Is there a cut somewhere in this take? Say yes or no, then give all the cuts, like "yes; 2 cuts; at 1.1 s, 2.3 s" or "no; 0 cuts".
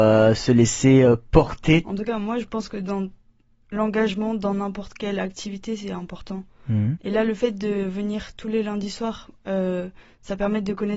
yes; 2 cuts; at 1.8 s, 7.0 s